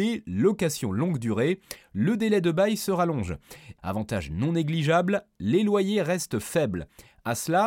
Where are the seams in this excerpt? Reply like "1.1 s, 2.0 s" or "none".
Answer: 3.8 s